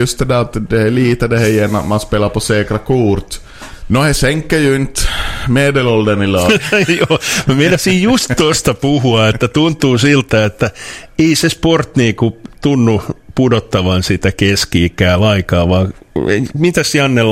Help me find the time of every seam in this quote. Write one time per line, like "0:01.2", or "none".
0:03.8